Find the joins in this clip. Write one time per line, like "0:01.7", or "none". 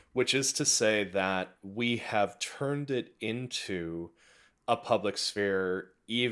none